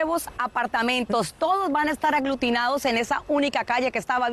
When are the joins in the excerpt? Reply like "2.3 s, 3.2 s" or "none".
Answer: none